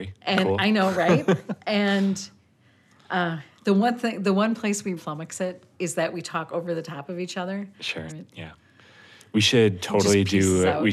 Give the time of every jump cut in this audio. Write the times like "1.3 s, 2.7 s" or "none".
5.0 s, 8.1 s